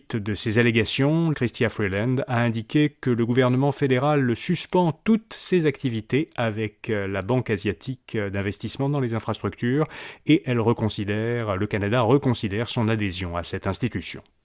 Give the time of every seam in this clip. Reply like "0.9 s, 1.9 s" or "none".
1.3 s